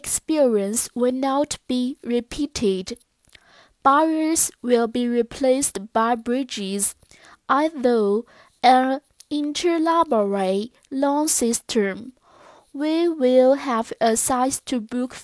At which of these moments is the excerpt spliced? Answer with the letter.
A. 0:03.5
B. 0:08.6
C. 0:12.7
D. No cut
D